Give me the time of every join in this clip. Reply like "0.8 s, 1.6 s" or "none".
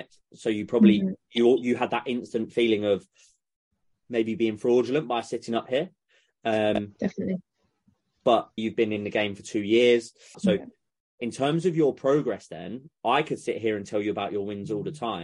8.6 s, 10.3 s